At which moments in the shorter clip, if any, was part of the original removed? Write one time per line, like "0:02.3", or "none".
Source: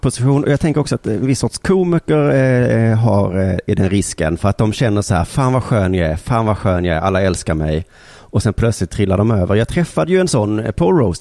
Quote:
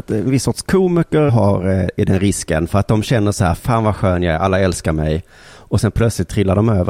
0:01.3
0:03.6